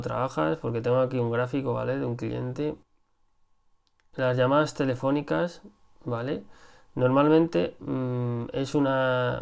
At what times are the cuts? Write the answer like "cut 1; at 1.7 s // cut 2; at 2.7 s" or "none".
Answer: none